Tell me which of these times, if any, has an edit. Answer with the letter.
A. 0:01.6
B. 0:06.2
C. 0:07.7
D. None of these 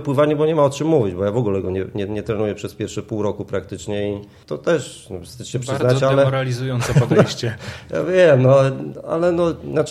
D